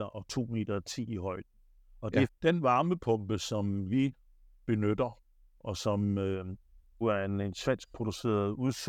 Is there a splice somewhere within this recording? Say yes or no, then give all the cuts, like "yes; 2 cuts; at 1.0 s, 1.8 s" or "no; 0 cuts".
yes; 2 cuts; at 2.3 s, 7.0 s